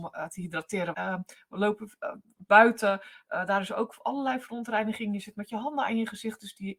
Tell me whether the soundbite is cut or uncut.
cut